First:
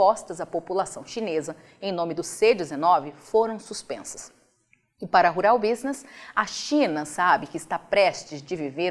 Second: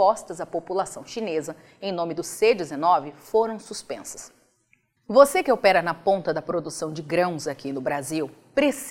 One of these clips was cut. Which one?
second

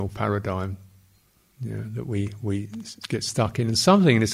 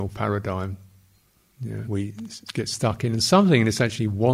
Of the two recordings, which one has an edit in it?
second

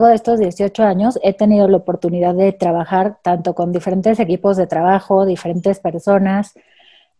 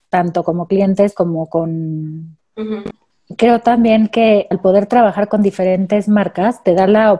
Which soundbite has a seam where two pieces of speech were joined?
second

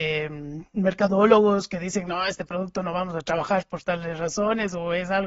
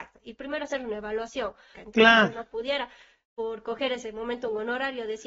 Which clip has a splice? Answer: second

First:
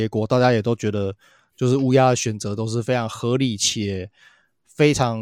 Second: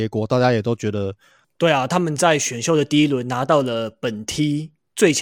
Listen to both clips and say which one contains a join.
second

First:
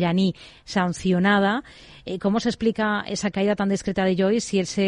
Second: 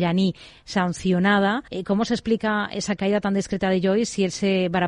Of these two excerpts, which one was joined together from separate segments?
second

